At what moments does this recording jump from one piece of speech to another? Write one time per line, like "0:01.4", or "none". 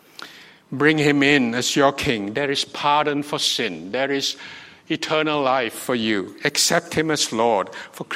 none